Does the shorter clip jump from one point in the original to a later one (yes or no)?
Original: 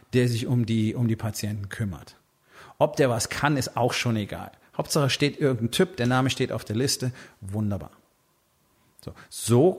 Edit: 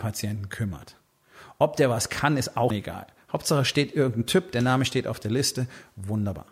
yes